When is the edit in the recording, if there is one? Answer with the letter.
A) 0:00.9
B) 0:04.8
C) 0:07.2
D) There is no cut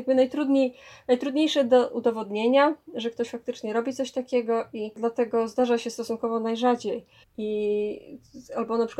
C